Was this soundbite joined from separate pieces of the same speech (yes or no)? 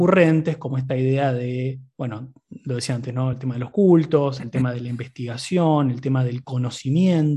no